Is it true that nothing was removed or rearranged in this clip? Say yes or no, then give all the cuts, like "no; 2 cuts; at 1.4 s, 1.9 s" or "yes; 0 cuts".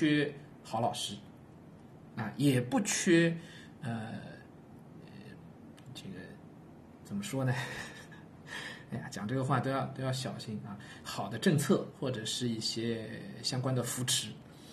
no; 1 cut; at 11.0 s